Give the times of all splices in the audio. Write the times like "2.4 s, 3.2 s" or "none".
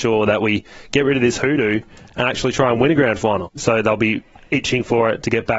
3.5 s

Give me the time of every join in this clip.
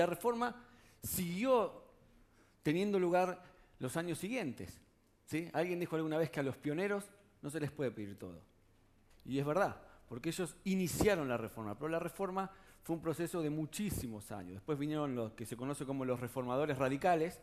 9.1 s

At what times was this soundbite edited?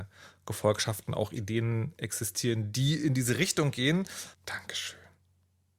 4.3 s

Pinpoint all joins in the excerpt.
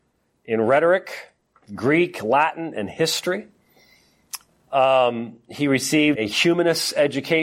4.5 s, 6.1 s

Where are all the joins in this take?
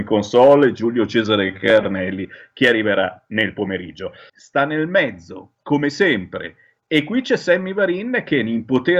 4.3 s

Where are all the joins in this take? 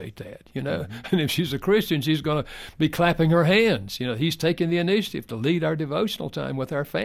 none

